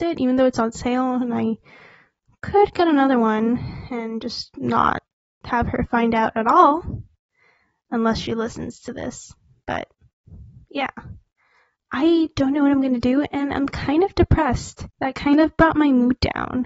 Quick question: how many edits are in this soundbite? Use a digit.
1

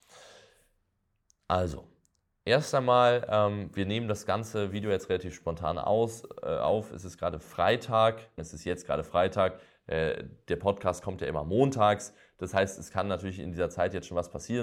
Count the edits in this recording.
1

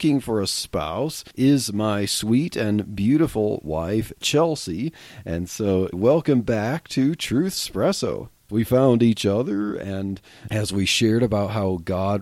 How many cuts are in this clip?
2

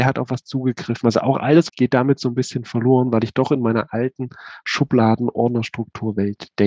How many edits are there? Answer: 1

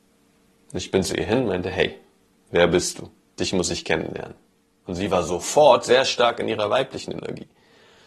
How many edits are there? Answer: 0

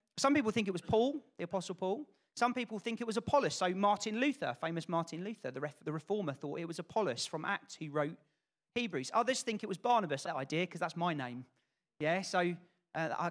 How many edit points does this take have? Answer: 2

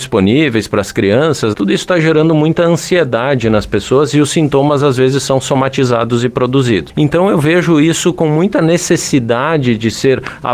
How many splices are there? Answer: 1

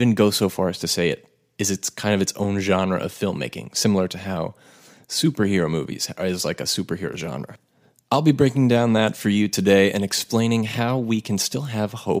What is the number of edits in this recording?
0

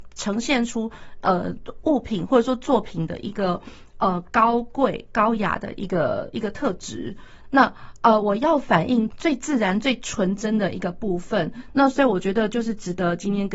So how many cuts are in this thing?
3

